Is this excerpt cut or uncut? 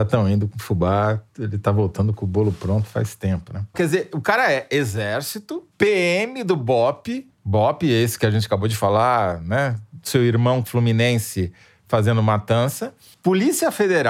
cut